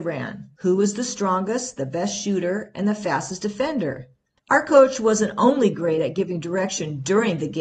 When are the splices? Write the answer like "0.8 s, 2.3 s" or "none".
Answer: 4.4 s